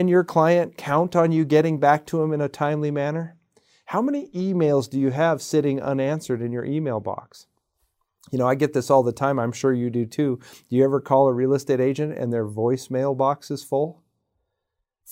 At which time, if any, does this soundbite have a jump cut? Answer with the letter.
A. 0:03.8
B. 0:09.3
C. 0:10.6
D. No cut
D